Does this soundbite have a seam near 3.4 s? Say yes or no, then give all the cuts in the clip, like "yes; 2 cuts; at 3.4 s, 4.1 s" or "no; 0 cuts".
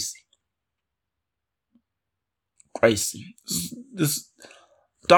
no; 0 cuts